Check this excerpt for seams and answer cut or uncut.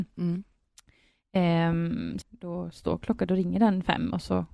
cut